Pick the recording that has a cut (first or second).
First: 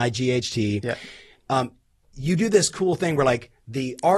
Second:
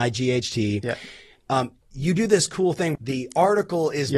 second